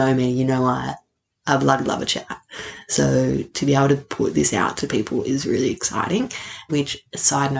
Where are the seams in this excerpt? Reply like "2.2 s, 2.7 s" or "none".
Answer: 6.7 s